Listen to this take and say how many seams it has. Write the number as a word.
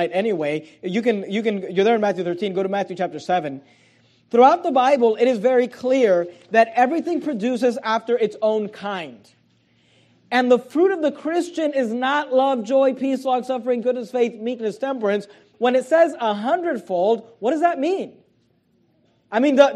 two